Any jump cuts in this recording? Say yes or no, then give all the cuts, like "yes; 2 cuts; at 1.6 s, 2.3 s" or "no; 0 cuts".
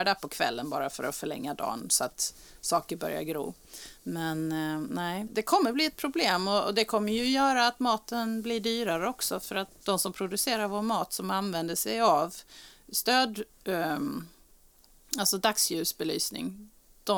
yes; 2 cuts; at 5.3 s, 9.8 s